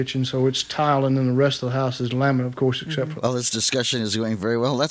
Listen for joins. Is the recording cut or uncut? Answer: cut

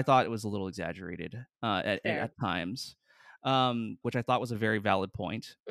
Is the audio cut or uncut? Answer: cut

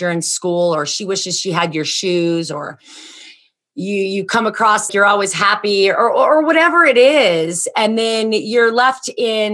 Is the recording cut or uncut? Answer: cut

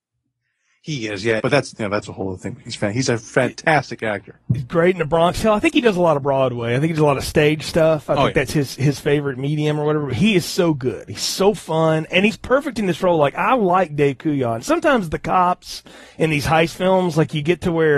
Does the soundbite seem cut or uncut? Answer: cut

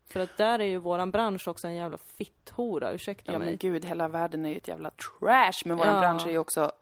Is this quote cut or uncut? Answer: cut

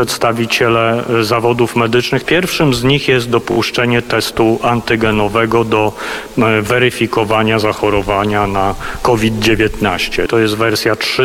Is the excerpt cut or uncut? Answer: cut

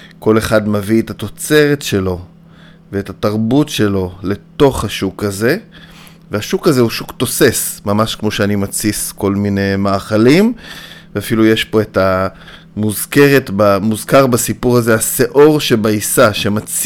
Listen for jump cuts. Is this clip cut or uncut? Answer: uncut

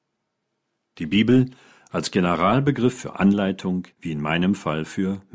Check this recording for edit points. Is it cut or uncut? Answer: cut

